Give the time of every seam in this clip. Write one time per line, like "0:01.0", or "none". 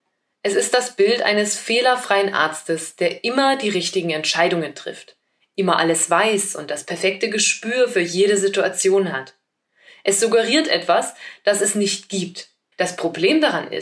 0:12.7